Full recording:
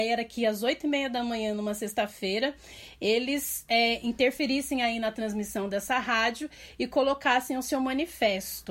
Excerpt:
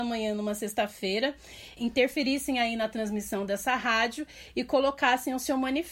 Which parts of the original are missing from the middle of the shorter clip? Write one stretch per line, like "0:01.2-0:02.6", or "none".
0:03.0-0:04.0